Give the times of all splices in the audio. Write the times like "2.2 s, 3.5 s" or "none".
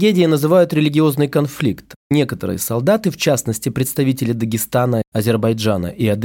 2.0 s